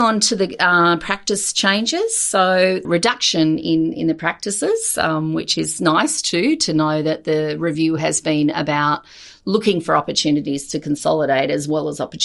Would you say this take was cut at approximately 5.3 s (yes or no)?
no